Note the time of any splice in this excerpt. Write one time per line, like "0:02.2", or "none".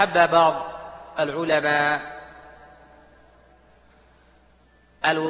none